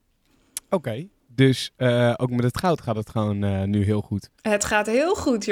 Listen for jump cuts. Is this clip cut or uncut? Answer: cut